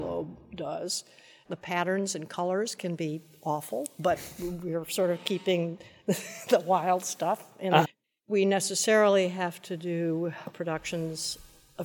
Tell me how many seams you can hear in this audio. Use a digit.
2